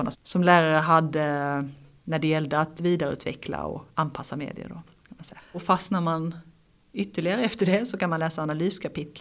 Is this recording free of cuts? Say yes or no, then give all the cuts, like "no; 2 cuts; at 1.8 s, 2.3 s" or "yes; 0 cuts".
no; 1 cut; at 5.4 s